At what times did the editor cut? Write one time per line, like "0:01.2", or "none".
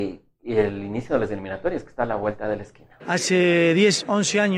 0:03.0